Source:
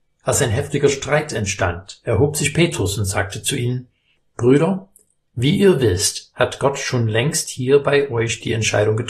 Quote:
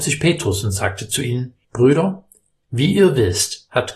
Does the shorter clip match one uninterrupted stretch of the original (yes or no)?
no